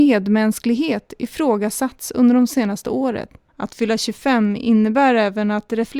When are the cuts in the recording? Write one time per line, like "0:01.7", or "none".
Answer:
0:03.5